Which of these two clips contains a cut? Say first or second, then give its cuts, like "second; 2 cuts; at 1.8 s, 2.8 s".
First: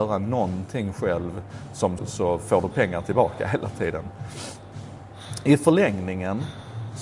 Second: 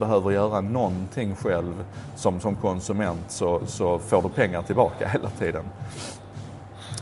first; 1 cut; at 2.0 s